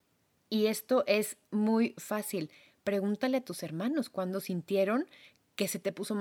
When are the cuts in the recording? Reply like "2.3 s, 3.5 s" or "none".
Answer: none